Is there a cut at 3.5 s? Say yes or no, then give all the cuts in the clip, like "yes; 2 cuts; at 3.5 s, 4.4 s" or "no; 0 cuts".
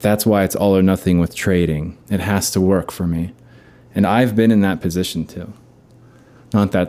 no; 1 cut; at 2.0 s